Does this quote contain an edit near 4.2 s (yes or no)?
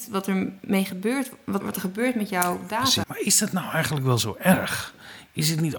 no